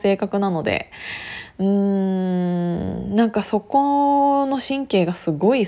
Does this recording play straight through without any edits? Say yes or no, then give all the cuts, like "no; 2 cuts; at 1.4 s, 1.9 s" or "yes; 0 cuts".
yes; 0 cuts